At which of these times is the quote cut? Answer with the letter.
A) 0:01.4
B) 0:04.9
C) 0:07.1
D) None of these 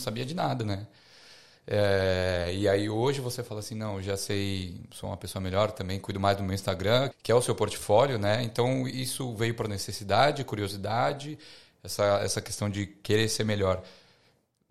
C